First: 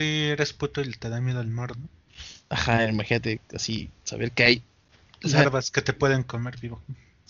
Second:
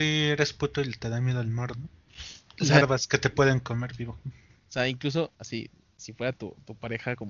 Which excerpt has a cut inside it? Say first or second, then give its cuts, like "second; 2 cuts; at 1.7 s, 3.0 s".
second; 2 cuts; at 2.5 s, 4.5 s